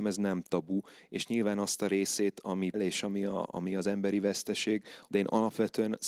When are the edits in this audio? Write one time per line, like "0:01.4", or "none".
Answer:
0:02.7
0:05.1